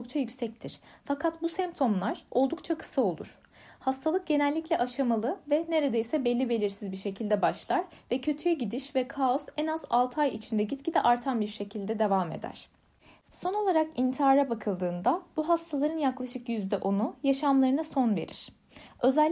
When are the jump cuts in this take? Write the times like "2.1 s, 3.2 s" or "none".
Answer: 13.2 s